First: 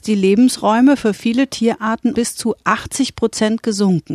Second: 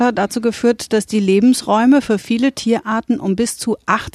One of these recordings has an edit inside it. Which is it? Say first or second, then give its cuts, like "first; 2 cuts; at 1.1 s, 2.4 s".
first; 1 cut; at 2.1 s